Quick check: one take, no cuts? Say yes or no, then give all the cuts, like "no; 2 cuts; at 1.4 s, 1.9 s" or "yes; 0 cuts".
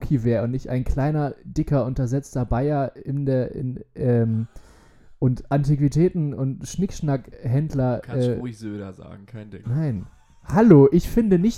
yes; 0 cuts